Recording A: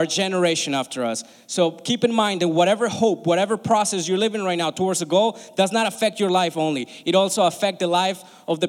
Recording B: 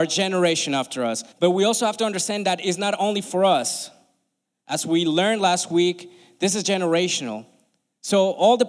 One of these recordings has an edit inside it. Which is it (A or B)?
B